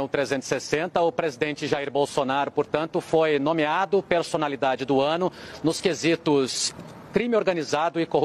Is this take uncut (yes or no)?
yes